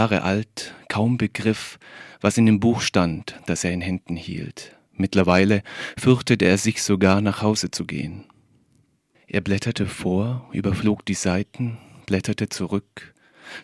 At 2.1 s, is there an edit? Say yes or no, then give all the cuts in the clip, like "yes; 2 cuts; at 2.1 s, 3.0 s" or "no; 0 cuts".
no; 2 cuts; at 4.9 s, 9.1 s